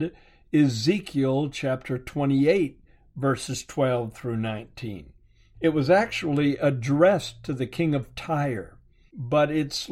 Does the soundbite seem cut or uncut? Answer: cut